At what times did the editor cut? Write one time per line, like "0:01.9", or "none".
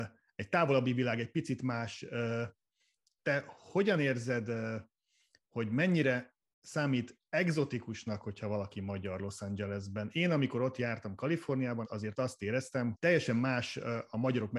0:03.0
0:11.8
0:12.9

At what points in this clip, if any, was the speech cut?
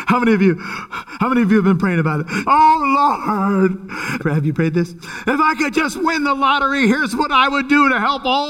0:02.4
0:04.2

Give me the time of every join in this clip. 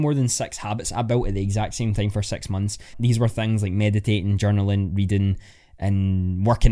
0:02.9

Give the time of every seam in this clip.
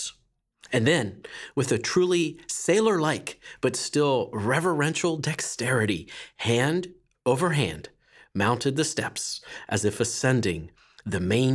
none

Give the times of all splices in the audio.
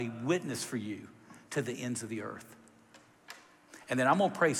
none

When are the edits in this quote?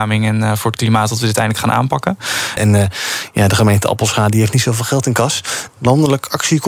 0:02.6
0:05.7

